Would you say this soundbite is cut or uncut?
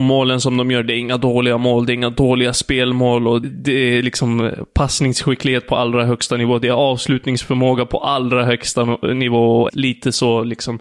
cut